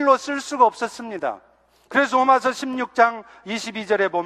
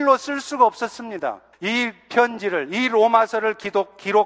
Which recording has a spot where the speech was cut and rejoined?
second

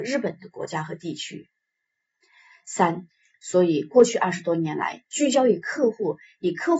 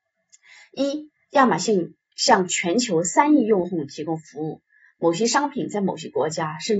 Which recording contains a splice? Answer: first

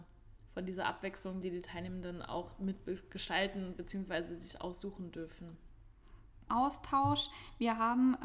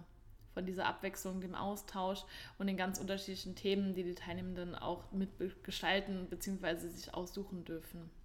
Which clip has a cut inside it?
first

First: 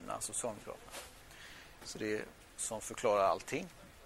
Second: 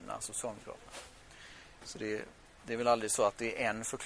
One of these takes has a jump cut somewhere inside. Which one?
first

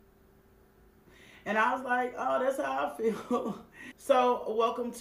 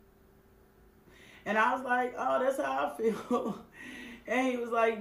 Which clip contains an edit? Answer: first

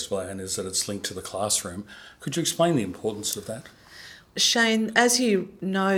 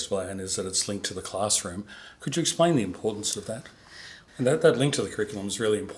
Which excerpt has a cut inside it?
second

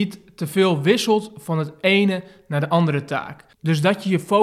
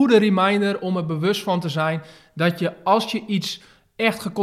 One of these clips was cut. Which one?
first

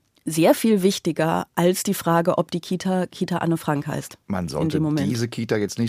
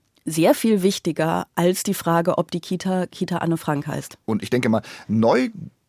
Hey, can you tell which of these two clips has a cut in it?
second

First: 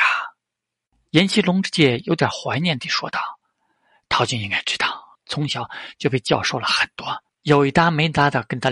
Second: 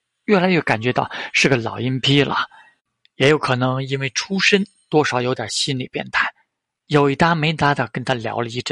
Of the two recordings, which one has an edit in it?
first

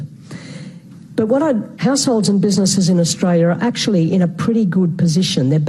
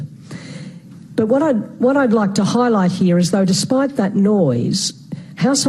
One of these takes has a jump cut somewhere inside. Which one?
first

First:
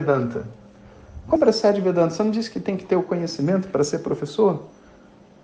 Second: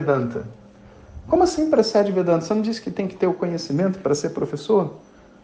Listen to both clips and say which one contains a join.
first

